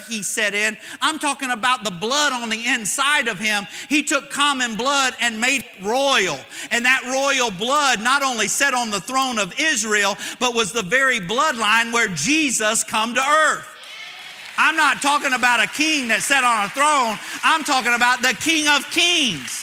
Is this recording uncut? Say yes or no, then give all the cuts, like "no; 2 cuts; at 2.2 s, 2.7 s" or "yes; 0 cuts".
yes; 0 cuts